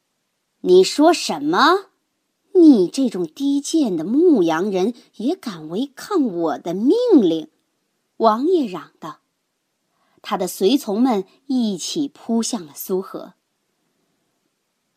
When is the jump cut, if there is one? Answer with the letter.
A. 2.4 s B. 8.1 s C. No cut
B